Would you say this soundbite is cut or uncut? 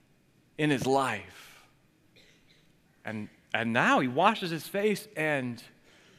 uncut